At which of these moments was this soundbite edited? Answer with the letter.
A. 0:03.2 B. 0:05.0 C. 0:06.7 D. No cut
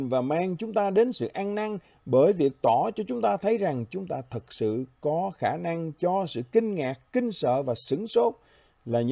D